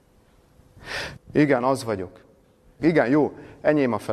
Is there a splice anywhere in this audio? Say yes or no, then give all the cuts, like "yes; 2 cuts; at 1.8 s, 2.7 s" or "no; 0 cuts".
yes; 2 cuts; at 1.1 s, 2.8 s